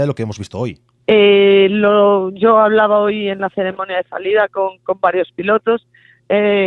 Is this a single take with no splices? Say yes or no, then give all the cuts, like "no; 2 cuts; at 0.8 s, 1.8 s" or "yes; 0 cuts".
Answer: no; 1 cut; at 1.0 s